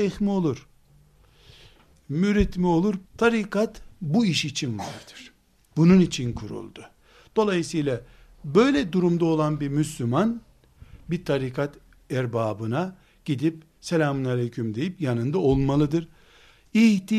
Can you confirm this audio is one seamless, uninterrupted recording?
no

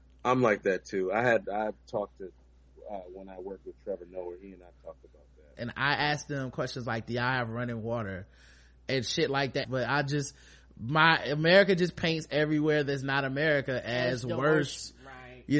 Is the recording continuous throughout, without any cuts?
no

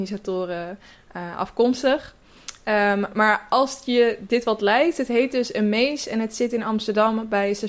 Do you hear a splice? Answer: no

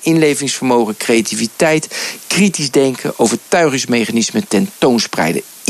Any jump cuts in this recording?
no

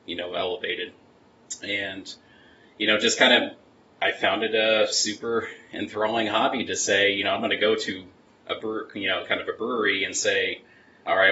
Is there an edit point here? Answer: no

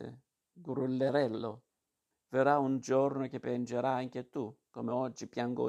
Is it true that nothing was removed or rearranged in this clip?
no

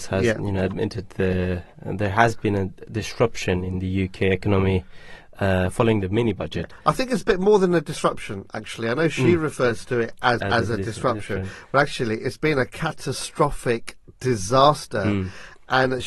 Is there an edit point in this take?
yes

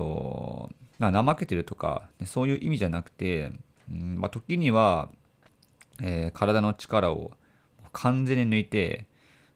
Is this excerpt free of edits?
no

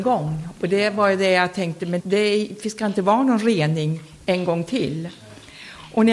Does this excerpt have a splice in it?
yes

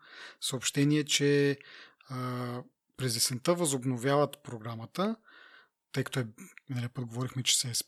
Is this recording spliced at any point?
no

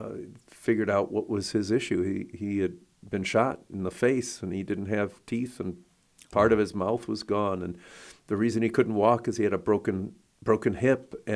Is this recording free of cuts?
yes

